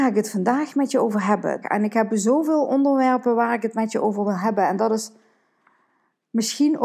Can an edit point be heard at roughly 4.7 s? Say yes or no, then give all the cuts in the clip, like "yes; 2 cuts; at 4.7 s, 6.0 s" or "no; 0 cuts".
no; 1 cut; at 1.6 s